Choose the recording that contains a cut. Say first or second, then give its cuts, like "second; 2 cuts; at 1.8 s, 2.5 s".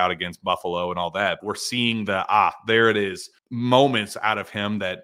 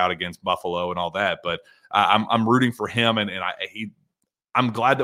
first; 2 cuts; at 1.4 s, 3.4 s